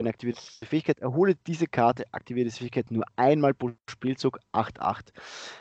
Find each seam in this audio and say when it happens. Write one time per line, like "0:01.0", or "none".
none